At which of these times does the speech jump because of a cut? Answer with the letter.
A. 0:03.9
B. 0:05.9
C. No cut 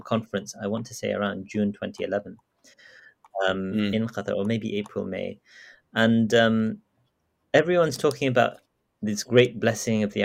C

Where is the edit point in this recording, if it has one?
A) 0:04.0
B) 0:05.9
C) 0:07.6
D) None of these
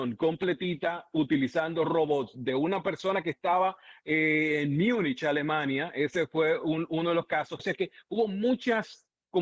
C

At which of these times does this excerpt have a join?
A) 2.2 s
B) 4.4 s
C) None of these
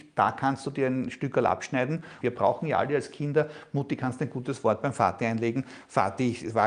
A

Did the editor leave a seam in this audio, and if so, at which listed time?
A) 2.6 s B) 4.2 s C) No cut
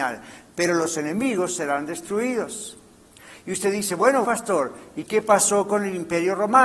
B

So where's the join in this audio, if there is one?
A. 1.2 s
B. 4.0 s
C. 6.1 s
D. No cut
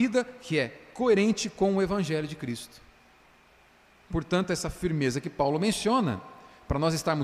B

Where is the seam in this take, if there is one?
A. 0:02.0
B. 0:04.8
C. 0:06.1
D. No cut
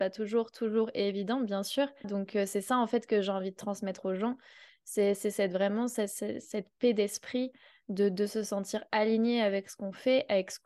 A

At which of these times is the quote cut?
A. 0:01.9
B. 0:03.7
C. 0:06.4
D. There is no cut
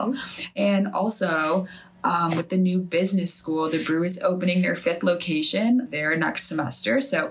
D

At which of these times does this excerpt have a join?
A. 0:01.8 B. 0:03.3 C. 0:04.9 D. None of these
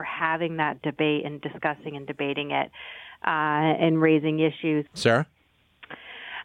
C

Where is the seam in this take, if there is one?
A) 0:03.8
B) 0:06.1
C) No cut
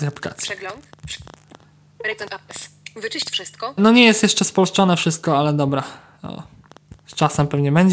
A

